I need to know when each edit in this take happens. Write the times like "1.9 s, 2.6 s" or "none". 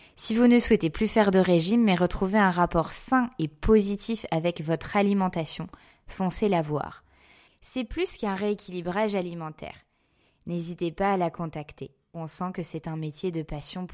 7.5 s, 10.3 s, 12.1 s